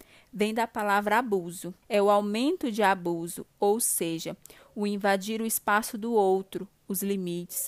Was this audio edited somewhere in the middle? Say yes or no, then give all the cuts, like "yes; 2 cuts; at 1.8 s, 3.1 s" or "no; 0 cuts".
yes; 2 cuts; at 1.8 s, 3.5 s